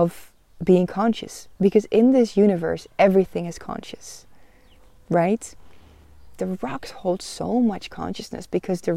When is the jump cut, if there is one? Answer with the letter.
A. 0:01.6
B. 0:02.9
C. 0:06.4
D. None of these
C